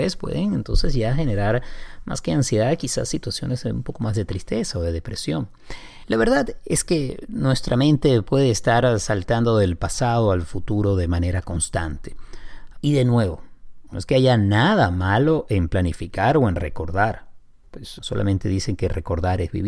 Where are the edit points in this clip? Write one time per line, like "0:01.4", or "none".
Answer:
0:12.7
0:13.9
0:18.0